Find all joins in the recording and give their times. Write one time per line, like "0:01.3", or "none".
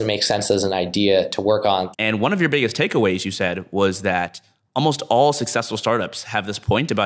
0:01.9